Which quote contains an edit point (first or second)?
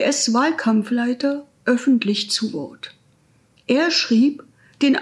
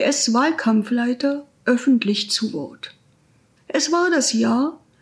second